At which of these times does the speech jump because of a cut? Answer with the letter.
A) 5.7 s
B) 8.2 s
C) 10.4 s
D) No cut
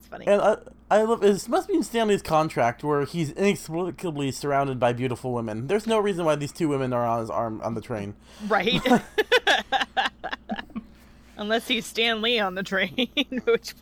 D